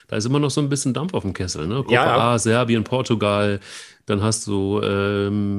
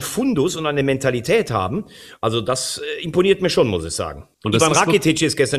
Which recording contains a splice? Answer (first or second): second